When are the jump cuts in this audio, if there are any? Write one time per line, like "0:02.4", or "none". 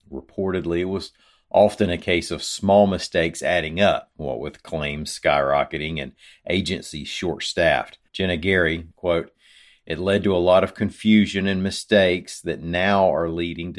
0:08.9